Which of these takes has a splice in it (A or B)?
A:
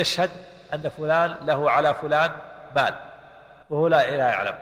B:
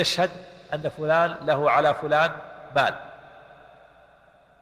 A